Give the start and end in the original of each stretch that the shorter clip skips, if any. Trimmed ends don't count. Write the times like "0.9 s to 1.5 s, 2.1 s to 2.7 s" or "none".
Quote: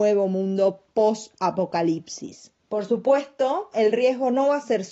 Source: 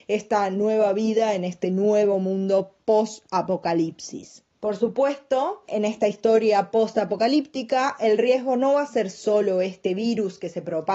5.6 s to 8.0 s